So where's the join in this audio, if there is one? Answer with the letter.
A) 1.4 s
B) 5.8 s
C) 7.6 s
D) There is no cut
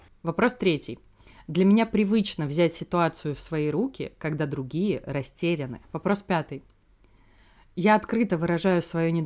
B